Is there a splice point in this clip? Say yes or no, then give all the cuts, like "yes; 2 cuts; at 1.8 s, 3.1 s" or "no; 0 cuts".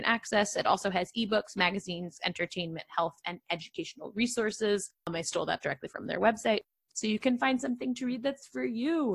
yes; 1 cut; at 2.2 s